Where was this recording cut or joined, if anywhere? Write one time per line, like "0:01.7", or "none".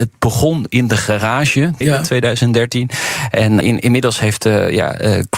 0:01.8
0:03.6

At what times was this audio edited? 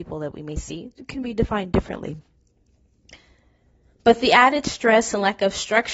none

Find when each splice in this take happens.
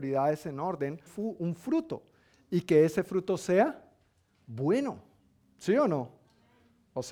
0:01.1

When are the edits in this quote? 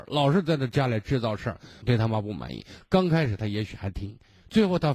0:01.8

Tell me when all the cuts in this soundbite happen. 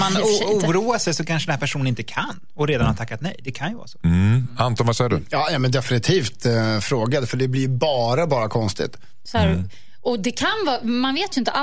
0:09.3

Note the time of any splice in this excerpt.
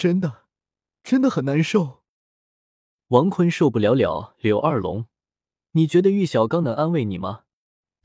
none

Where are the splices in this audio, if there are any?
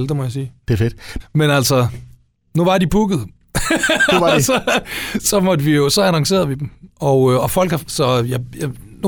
0:01.2
0:07.9

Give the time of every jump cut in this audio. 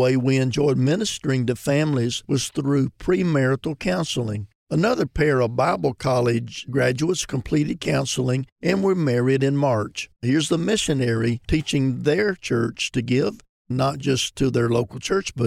0:04.6
0:10.2

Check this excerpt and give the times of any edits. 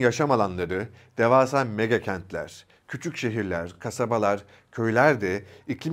none

